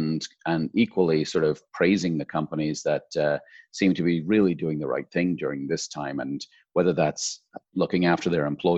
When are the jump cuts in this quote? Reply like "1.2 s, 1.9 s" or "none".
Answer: none

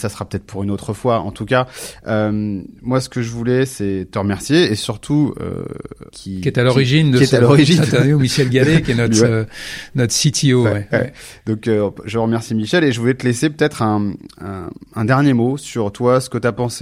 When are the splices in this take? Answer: 6.1 s

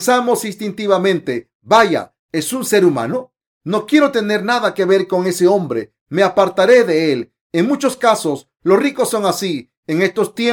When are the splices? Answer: none

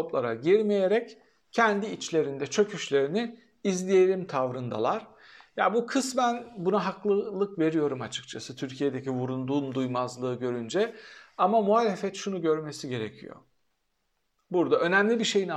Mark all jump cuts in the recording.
none

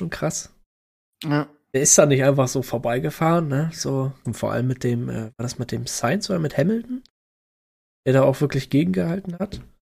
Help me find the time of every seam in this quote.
4.2 s

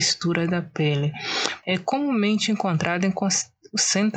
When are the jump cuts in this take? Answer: 1.6 s

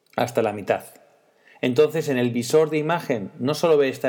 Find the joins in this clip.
none

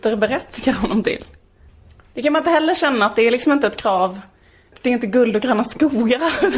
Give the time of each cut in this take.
none

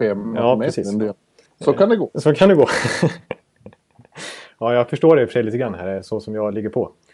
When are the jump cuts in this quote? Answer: 1.5 s

